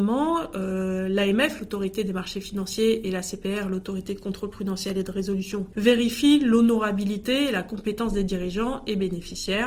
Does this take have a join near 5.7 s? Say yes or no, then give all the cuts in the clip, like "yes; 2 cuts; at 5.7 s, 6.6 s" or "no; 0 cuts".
yes; 1 cut; at 5.7 s